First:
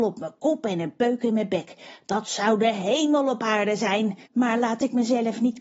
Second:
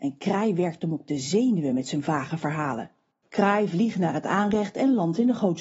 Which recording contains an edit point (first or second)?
first